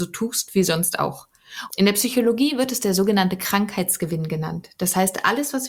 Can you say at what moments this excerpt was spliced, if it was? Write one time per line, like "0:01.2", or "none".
0:01.7